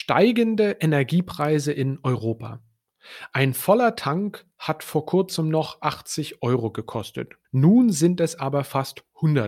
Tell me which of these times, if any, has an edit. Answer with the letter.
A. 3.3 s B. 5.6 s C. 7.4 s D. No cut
C